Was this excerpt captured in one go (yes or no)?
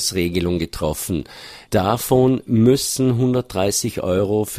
no